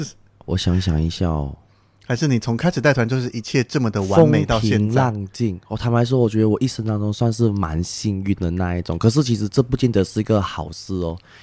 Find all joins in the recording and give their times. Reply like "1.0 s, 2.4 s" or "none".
none